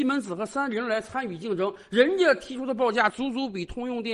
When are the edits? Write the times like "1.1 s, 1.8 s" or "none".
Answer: none

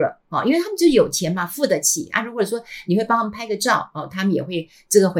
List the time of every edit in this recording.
none

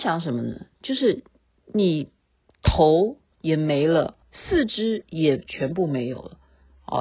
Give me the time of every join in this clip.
4.2 s

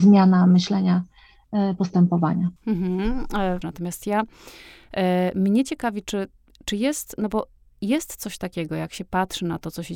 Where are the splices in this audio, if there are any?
2.6 s, 3.6 s

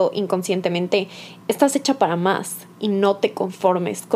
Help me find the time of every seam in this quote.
1.4 s

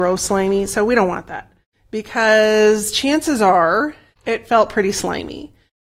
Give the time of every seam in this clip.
1.7 s, 4.2 s

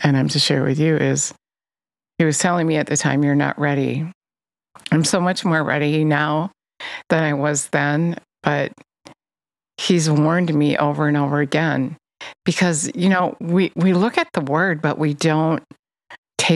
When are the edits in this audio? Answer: none

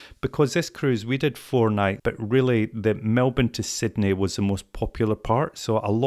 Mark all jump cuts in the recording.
2.0 s

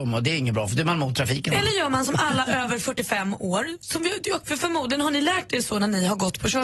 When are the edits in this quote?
4.4 s

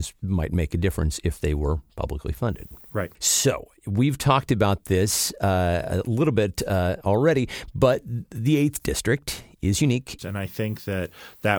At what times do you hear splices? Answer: 3.1 s, 10.2 s

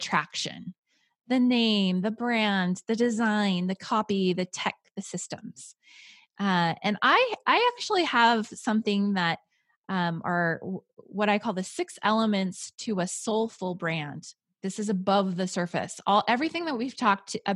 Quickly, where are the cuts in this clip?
14.6 s

